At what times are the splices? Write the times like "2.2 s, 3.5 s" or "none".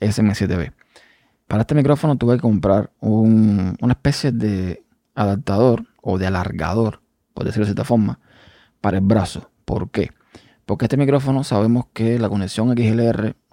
none